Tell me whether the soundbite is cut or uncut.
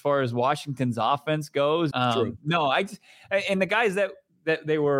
cut